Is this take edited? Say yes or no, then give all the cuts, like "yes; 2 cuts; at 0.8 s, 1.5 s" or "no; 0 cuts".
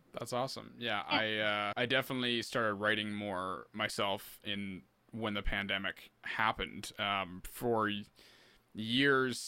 yes; 1 cut; at 1.7 s